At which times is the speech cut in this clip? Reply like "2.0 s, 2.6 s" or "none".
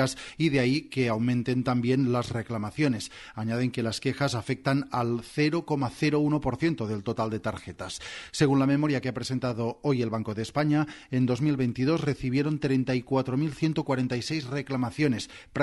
none